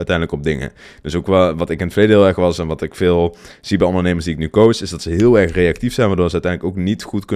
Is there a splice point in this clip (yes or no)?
no